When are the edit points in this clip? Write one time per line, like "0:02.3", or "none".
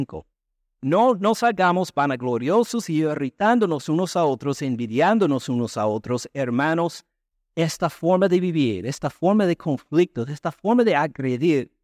0:07.3